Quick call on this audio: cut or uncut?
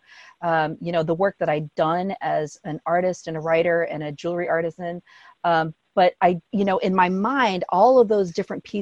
cut